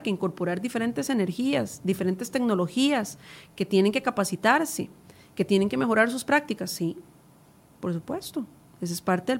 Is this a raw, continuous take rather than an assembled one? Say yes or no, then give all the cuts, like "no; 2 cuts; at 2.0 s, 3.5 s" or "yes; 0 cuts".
yes; 0 cuts